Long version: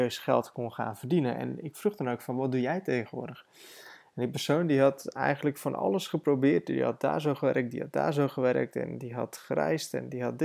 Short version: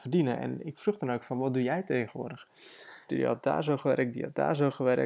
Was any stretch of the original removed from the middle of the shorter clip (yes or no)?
yes